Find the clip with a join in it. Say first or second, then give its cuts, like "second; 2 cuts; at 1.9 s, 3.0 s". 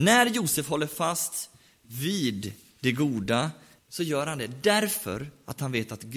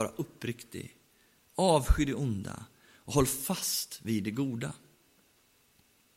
first; 1 cut; at 3.8 s